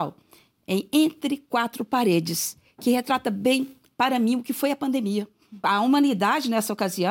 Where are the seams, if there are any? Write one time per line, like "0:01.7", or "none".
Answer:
0:05.6